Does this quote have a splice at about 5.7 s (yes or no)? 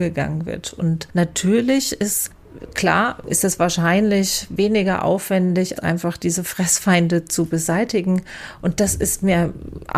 yes